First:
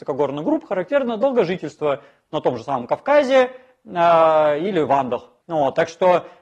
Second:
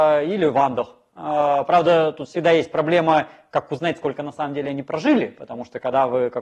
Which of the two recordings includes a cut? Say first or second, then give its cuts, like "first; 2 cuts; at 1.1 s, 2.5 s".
first; 1 cut; at 5.4 s